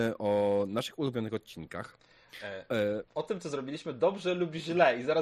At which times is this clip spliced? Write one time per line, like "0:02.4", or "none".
0:03.1